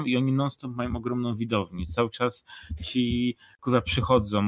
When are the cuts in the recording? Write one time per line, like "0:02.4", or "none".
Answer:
none